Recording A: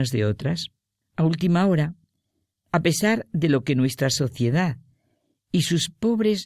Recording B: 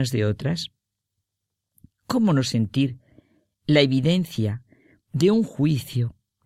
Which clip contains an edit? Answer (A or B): A